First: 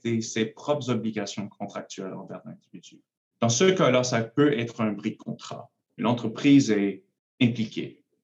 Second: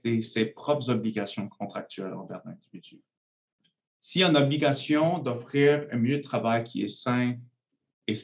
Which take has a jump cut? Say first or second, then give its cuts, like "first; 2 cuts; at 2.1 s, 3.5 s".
first; 2 cuts; at 3.3 s, 6.0 s